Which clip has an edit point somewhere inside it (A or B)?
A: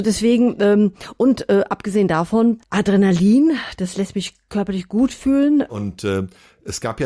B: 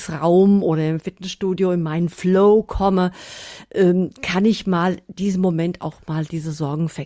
A